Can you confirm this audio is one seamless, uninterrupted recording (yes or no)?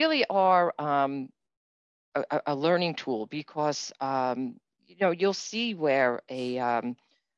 yes